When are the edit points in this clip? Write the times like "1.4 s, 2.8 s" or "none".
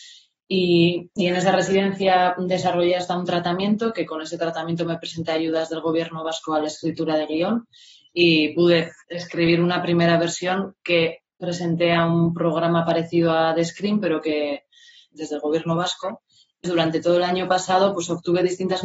15.1 s, 16.6 s